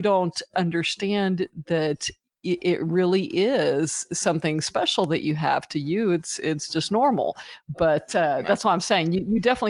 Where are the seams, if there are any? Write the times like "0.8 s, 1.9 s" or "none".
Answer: none